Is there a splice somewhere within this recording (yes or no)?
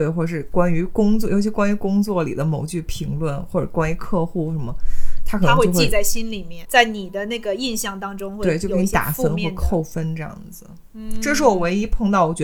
yes